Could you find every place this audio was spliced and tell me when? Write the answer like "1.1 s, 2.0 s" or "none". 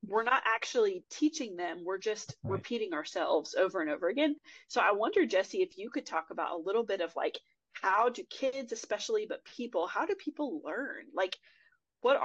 none